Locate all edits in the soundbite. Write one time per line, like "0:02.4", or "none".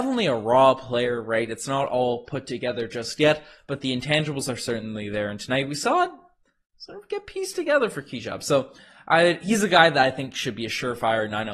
none